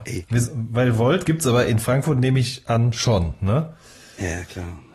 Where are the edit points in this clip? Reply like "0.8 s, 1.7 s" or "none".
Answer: none